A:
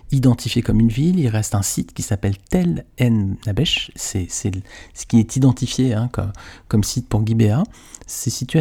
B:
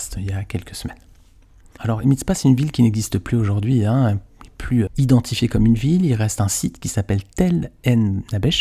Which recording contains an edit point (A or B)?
B